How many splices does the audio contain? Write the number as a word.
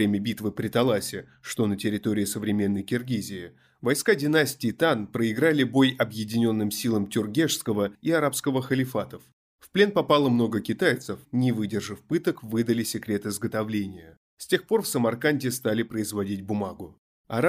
one